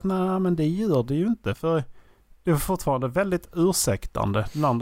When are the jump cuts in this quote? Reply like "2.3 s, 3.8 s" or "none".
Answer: none

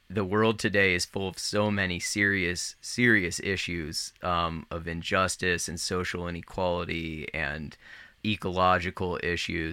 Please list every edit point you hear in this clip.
none

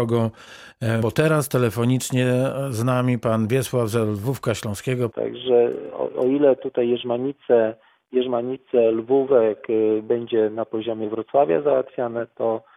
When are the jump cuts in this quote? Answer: 1.0 s, 5.1 s

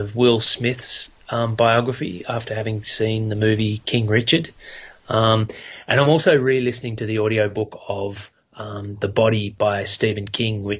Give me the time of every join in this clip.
none

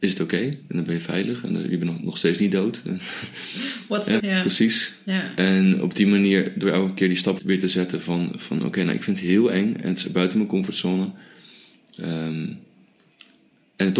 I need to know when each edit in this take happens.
4.2 s, 7.4 s

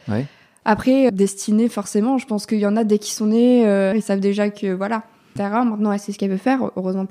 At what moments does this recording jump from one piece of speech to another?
1.1 s, 3.9 s, 5.4 s

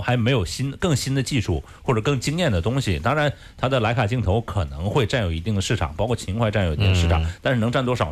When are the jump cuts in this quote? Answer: none

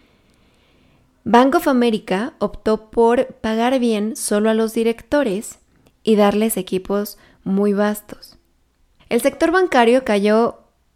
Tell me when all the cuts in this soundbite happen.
9.0 s

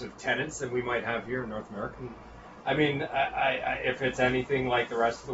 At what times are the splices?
1.9 s

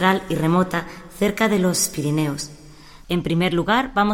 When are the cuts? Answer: 3.0 s

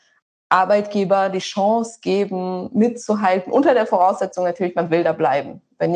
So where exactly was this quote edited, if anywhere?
none

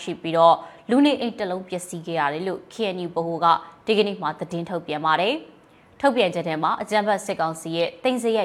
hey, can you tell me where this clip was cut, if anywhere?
none

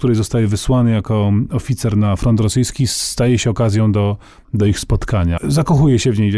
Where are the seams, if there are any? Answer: 5.4 s

